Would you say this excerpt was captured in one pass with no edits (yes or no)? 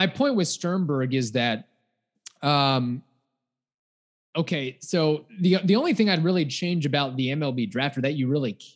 yes